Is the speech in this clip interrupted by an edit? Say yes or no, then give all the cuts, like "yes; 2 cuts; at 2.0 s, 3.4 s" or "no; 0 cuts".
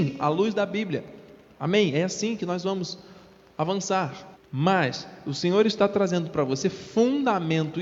yes; 1 cut; at 4.3 s